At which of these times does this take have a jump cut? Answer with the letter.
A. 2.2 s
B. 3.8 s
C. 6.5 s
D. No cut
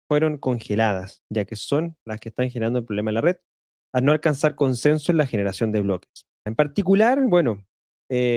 C